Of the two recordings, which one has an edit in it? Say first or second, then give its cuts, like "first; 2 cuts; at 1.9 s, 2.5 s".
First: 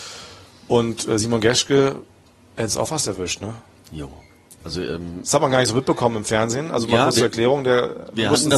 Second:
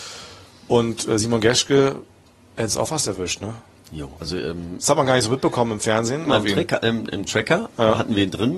second; 2 cuts; at 4.2 s, 6.3 s